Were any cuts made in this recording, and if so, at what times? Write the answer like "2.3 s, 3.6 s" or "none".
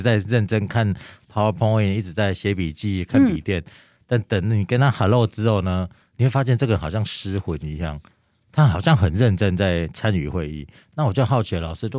none